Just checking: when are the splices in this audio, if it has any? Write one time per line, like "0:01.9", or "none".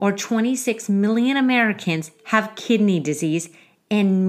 none